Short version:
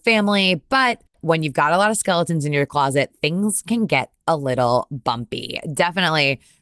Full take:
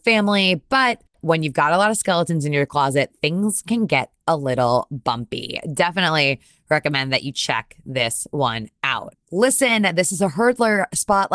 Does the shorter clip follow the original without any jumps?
yes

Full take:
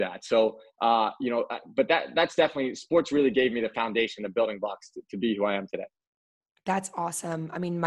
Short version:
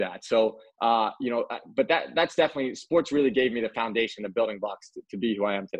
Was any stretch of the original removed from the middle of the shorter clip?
no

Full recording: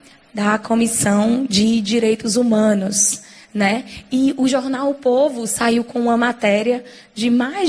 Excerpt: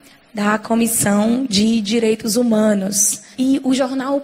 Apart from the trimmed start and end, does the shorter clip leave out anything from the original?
yes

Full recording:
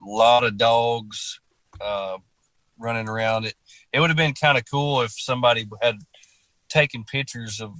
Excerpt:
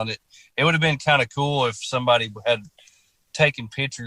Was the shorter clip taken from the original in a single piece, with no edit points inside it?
yes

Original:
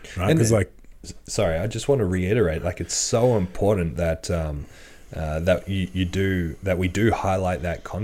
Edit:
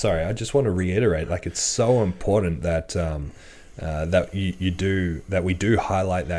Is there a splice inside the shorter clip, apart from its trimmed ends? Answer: no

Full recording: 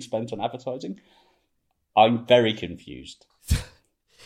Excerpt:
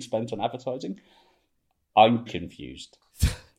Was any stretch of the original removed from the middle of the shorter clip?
yes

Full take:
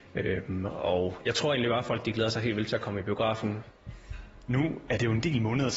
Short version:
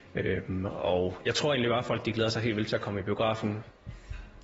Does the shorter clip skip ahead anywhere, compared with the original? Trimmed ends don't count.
no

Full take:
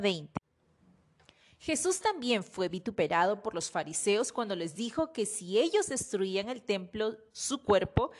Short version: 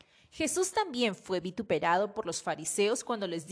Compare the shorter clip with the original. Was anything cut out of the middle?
no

